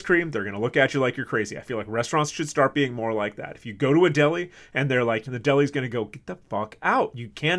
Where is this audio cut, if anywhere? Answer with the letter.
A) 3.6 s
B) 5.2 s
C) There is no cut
B